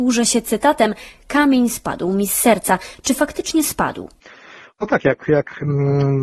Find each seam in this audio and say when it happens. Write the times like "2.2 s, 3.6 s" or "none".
none